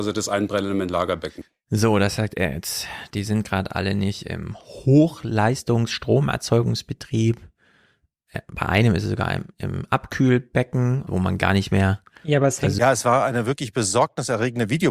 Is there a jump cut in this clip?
yes; 2 cuts; at 11.1 s, 12.8 s

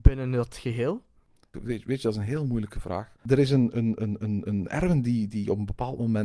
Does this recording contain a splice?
yes; 1 cut; at 3.2 s

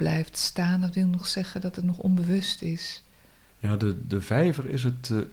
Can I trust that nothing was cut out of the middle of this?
no; 1 cut; at 3.5 s

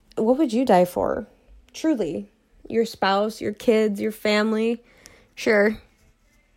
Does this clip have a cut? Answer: no; 0 cuts

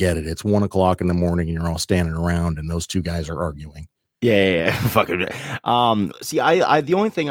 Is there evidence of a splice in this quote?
yes; 1 cut; at 6.1 s

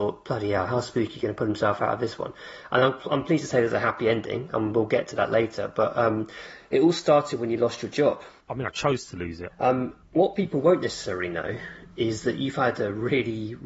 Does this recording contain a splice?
yes; 2 cuts; at 8.4 s, 9.5 s

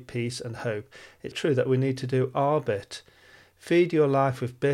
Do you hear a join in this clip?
yes; 1 cut; at 1.3 s

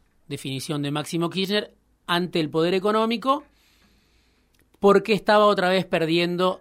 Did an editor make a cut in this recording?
no; 0 cuts

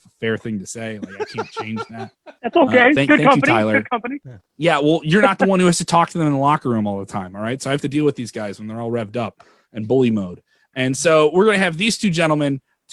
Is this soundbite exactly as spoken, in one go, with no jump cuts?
yes; 0 cuts

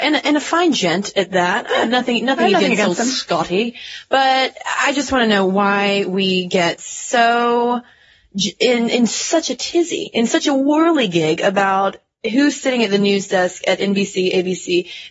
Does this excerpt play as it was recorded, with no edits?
yes; 0 cuts

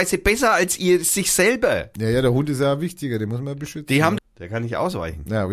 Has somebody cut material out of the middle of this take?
yes; 1 cut; at 4.2 s

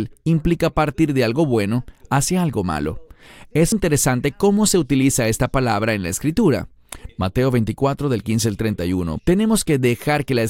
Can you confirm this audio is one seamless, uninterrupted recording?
no; 3 cuts; at 3.7 s, 7.1 s, 9.2 s

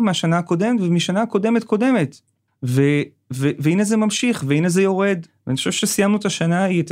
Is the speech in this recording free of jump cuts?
no; 1 cut; at 2.5 s

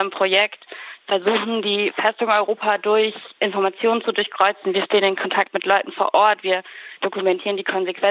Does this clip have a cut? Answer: no; 0 cuts

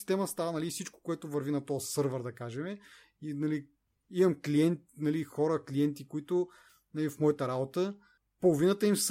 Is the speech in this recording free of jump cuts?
yes; 0 cuts

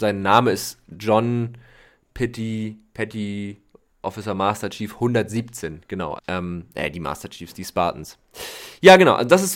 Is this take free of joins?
no; 1 cut; at 6.2 s

